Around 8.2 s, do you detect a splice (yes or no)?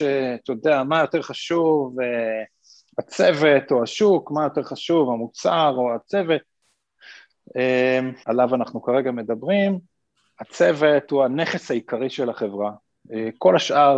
yes